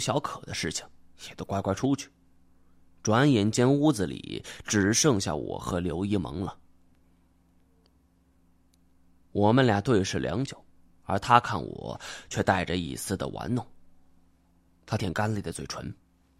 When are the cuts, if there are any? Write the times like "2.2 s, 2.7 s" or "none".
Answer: 10.9 s, 15.0 s